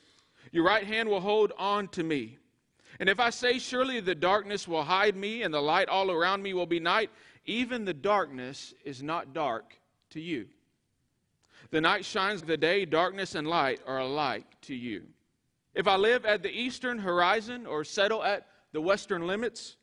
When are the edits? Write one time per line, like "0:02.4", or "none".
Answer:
0:12.4
0:15.7

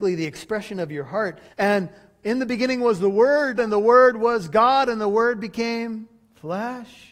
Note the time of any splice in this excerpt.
0:01.5
0:03.6

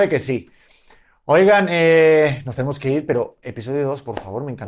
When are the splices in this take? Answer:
none

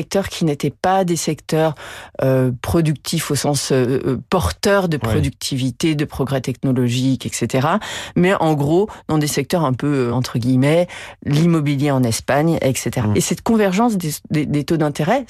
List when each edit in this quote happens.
0:10.1
0:13.1

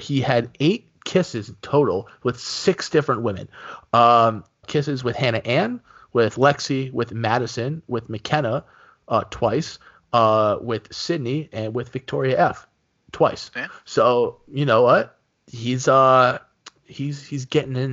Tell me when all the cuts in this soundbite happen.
0:04.6

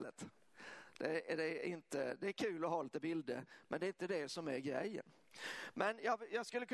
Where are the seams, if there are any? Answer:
none

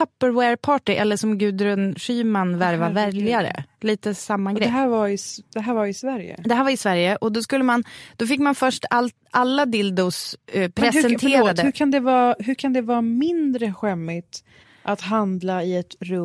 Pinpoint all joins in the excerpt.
none

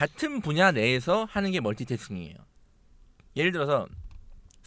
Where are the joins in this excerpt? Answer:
none

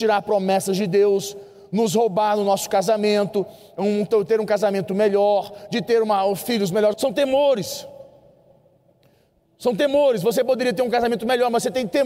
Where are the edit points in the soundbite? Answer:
0:06.9

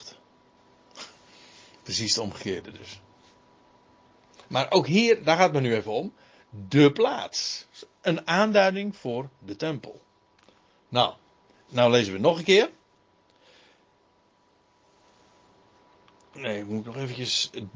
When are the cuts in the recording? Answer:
none

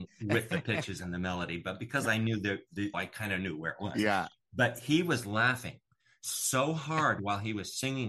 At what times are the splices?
0:02.9

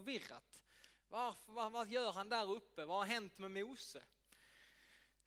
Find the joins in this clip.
none

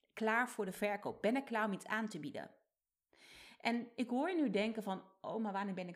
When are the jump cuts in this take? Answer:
none

